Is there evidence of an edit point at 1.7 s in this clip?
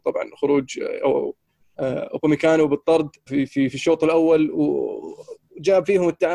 no; 1 cut; at 3.3 s

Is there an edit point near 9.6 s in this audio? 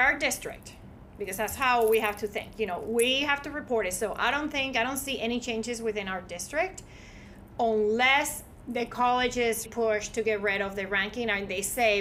yes; 1 cut; at 9.6 s

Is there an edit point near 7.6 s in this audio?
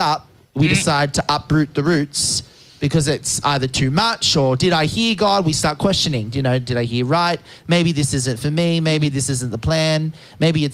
no; 0 cuts

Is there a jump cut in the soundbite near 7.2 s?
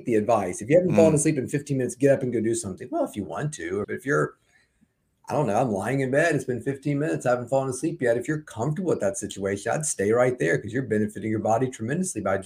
no; 1 cut; at 3.8 s

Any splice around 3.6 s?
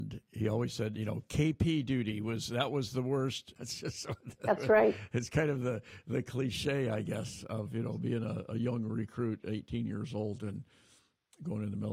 yes; 1 cut; at 3.6 s

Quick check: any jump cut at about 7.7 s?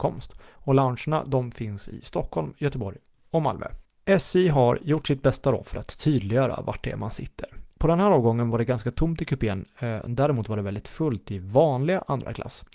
yes; 1 cut; at 7.7 s

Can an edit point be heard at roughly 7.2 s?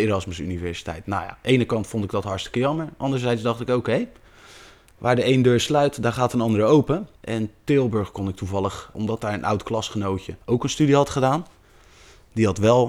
yes; 3 cuts; at 7.2 s, 8.9 s, 10.4 s

